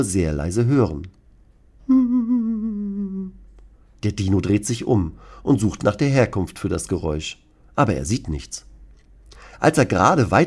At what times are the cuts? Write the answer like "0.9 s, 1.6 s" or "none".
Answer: none